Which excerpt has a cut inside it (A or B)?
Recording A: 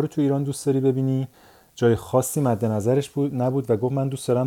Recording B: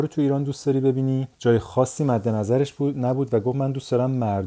B